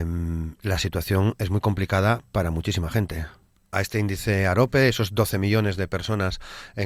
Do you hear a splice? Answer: yes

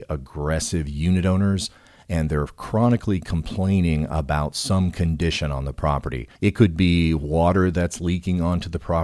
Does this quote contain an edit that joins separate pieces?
yes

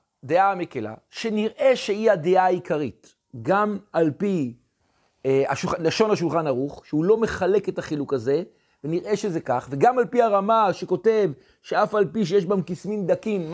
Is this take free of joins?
yes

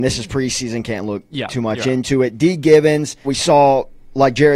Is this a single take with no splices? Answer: no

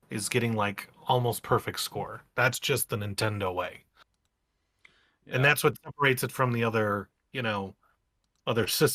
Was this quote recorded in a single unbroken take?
yes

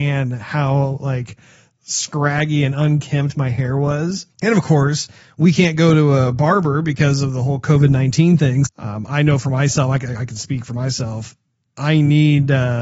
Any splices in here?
yes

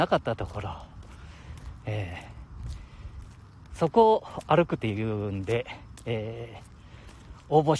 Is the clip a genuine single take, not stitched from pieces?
yes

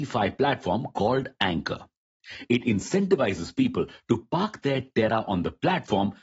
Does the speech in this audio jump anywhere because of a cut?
no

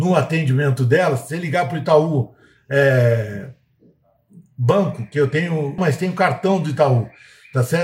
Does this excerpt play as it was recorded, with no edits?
no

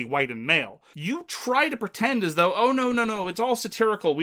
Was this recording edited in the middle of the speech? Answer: yes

